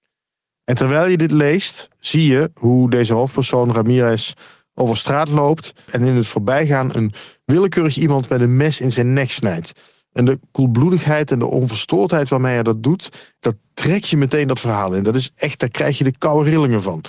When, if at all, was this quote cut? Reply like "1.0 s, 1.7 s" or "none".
13.4 s